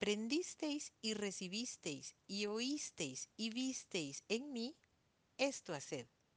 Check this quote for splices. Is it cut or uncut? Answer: uncut